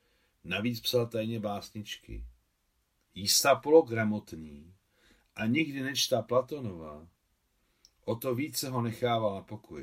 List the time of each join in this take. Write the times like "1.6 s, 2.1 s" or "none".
3.0 s